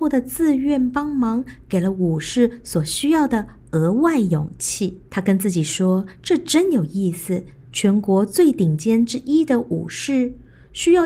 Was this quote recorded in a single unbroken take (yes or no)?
no